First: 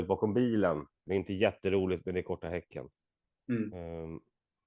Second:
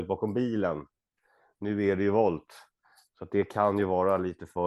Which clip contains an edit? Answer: first; 1 cut; at 1.1 s

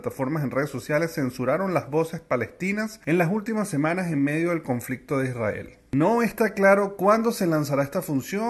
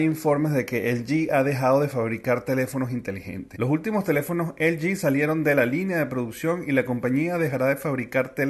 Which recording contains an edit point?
second; 1 cut; at 3.5 s

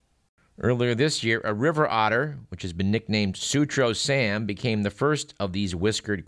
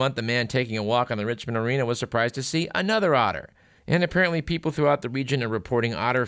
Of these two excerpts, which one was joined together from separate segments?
second; 1 cut; at 3.8 s

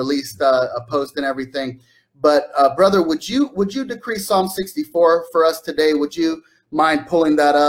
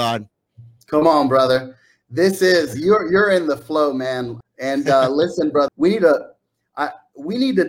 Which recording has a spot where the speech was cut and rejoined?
second; 2 cuts; at 4.4 s, 5.7 s

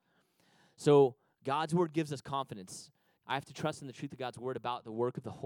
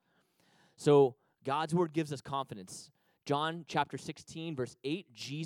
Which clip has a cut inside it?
first; 1 cut; at 3.2 s

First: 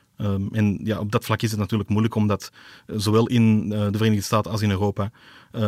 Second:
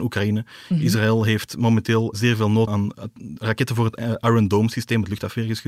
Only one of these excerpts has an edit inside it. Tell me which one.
second; 1 cut; at 2.7 s

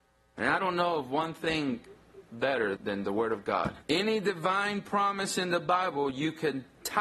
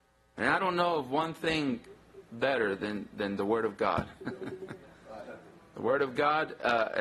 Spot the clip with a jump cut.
first; 2 cuts; at 2.8 s, 3.8 s

